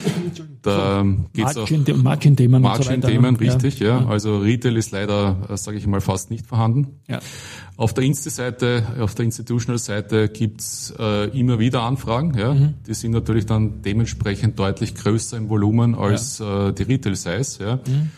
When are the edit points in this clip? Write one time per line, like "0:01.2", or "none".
none

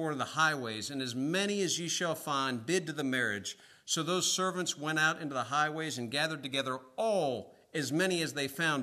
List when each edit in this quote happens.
none

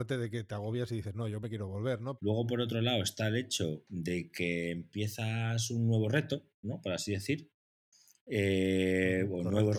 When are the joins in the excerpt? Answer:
0:02.2

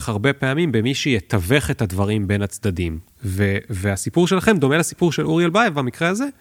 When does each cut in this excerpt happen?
0:03.1

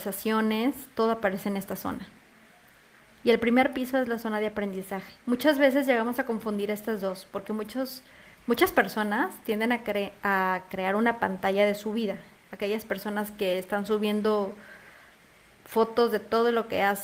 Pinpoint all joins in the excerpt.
0:05.2

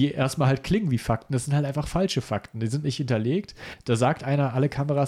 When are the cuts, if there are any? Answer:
none

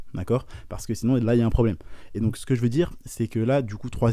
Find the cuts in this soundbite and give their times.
none

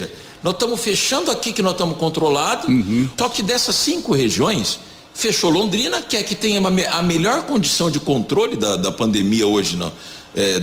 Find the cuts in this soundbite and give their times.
0:03.2

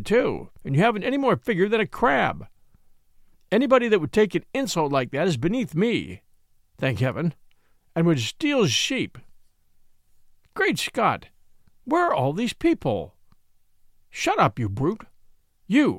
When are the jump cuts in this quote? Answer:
none

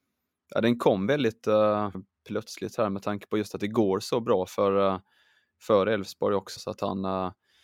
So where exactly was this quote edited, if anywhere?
0:01.9
0:06.6

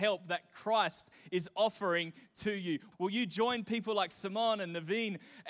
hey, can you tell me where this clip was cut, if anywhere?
0:02.9

